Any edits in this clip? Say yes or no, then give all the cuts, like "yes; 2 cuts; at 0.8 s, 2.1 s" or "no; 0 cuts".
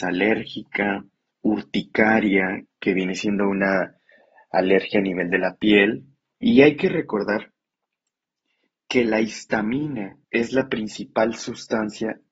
yes; 2 cuts; at 6.4 s, 10.2 s